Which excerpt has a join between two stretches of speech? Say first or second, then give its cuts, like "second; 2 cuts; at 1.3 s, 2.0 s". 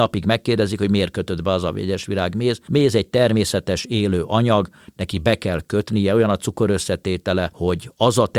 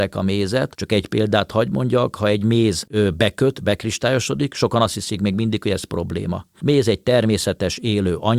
second; 1 cut; at 6.5 s